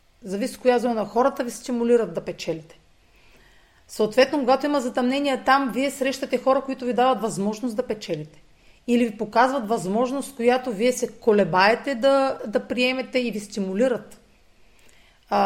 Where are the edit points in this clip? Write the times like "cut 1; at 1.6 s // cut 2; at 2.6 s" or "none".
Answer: none